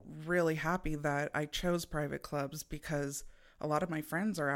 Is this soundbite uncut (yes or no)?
yes